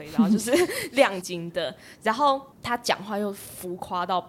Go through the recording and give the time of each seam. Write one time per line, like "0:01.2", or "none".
0:01.2
0:02.5